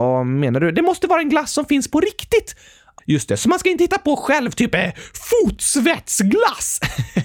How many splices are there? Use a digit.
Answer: 1